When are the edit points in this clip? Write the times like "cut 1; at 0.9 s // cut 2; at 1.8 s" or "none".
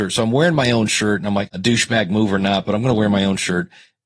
cut 1; at 1.5 s